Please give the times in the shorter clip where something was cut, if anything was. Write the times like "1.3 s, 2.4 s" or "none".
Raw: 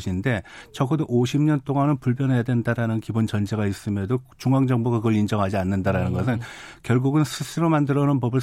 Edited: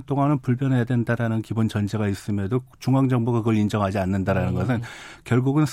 none